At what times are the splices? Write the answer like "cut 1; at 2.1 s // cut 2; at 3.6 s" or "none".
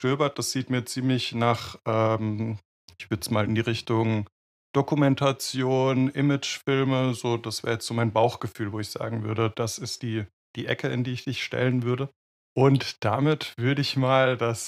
none